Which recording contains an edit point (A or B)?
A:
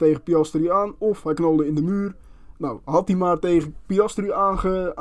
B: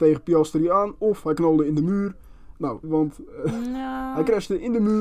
B